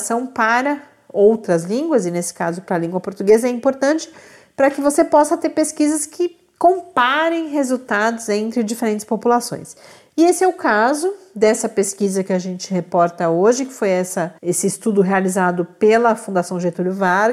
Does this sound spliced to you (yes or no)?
yes